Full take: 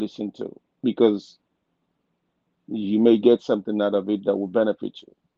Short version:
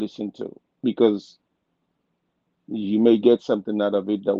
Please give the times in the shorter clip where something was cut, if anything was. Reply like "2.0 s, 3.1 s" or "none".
none